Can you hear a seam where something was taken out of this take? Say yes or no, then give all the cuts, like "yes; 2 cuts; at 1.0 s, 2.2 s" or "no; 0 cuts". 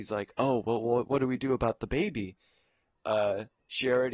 yes; 1 cut; at 2.9 s